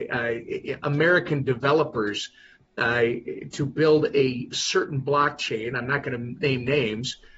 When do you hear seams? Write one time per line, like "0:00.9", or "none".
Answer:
none